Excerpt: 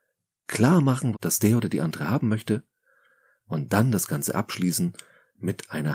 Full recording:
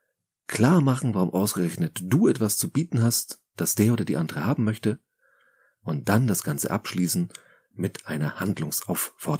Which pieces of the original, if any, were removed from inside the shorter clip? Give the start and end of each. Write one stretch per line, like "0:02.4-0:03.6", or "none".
0:01.1-0:03.5